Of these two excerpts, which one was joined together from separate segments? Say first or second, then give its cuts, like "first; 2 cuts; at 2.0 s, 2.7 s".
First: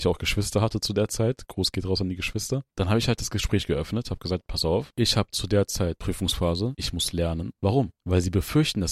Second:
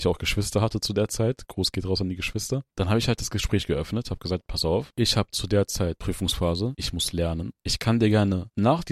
first; 1 cut; at 7.6 s